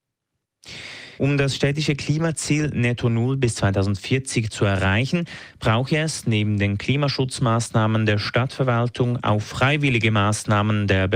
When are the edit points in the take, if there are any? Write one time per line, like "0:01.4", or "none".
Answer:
0:01.2